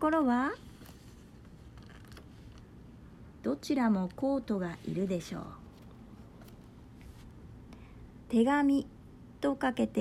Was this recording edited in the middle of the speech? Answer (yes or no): no